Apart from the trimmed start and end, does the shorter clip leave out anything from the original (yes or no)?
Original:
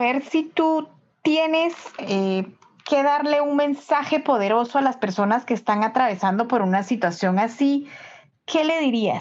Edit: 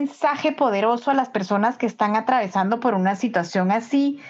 no